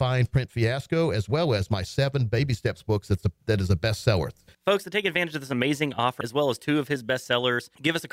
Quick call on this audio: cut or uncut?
cut